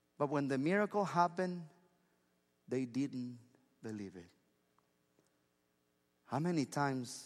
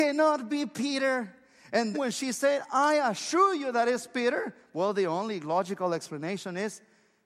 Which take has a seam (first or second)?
second